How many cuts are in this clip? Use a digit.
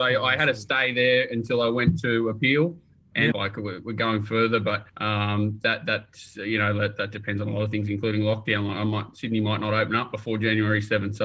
2